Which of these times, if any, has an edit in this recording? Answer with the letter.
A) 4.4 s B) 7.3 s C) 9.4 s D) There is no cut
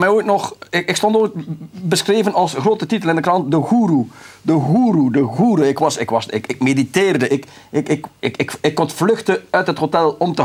B